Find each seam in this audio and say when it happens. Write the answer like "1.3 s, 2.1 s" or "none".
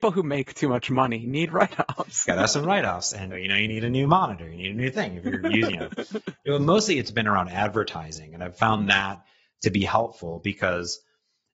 3.3 s, 6.4 s